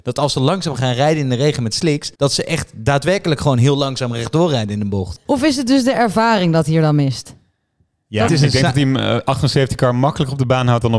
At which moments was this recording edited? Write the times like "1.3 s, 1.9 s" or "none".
2.1 s, 8.3 s

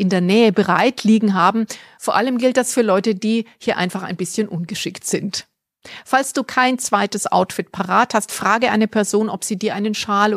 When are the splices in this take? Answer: none

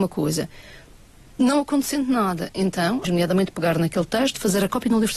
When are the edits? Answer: 3.0 s

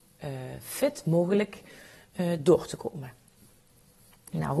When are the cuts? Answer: none

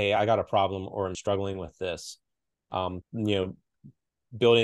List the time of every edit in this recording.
3.0 s

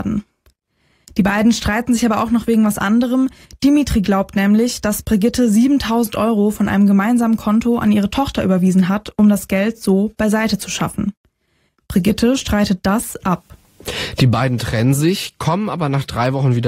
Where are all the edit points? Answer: none

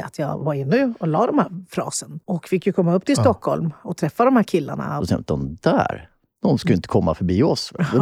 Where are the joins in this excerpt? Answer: 2.2 s, 5.0 s

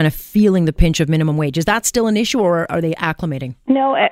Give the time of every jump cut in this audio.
none

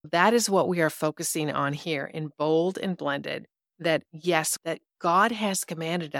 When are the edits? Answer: 4.6 s

